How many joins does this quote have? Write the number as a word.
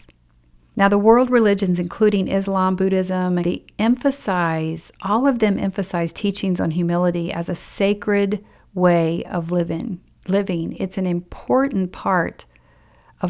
one